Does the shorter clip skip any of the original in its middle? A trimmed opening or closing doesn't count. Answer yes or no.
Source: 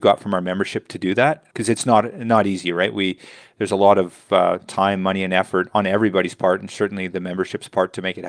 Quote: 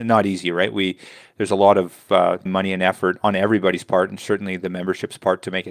yes